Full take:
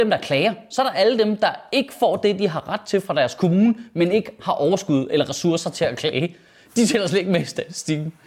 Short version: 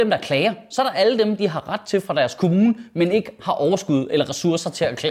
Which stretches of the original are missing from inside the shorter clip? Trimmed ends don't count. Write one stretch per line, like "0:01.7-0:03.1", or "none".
0:01.4-0:02.4